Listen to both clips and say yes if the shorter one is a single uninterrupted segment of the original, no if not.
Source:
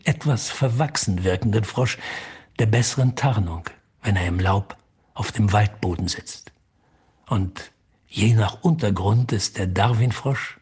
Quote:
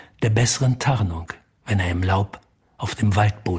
yes